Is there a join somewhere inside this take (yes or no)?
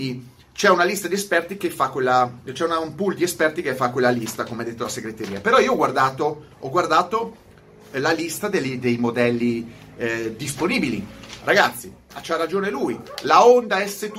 no